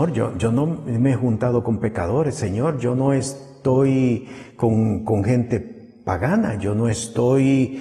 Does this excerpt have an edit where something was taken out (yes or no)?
no